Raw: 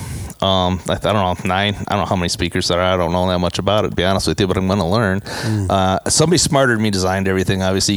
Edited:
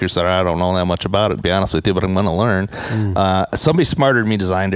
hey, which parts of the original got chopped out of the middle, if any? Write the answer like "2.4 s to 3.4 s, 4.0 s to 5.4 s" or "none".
none